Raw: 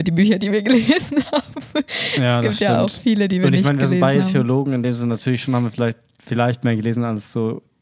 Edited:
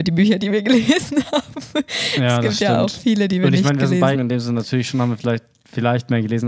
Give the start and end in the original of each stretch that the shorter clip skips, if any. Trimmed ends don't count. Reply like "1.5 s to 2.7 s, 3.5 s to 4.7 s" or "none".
4.1 s to 4.7 s